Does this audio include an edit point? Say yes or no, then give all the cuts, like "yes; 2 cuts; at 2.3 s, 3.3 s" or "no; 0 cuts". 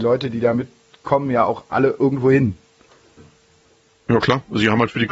no; 0 cuts